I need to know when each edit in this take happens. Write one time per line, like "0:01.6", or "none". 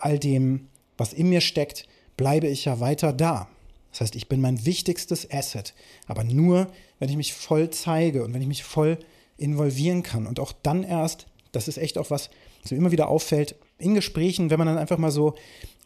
none